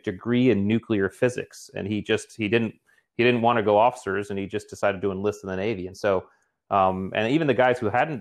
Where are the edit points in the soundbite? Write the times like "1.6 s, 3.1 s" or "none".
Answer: none